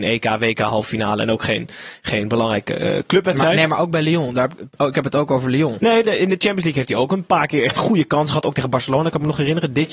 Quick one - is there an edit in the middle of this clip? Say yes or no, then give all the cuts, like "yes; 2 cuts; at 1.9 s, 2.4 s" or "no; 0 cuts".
yes; 1 cut; at 6.0 s